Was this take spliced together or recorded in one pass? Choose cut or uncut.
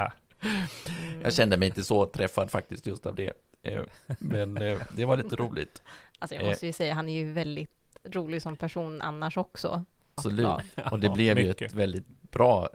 cut